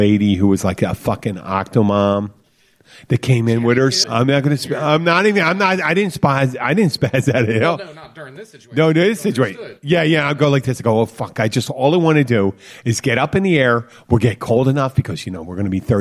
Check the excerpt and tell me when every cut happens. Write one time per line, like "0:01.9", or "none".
0:04.0